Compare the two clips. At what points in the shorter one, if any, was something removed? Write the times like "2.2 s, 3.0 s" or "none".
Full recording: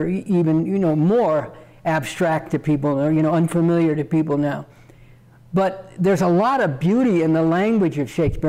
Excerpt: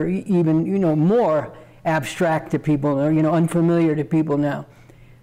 none